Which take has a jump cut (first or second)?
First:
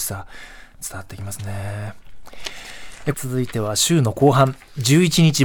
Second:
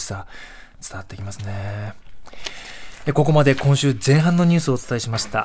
first